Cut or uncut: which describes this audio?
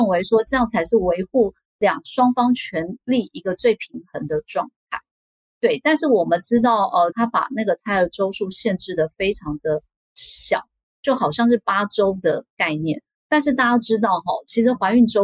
cut